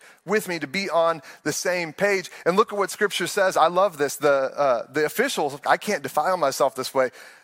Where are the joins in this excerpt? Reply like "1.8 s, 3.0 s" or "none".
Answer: 5.6 s